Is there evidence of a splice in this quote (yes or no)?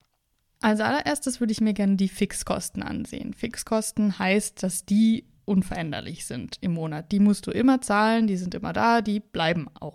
no